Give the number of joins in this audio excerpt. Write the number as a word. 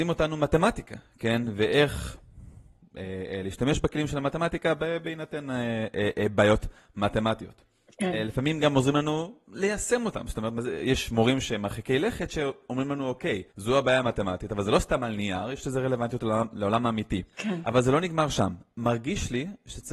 two